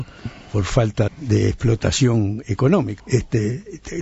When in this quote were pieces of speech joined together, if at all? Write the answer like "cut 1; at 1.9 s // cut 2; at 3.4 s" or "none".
cut 1; at 1.1 s // cut 2; at 3.0 s